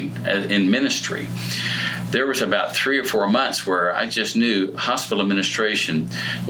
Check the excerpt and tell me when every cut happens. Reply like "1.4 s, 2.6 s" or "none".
none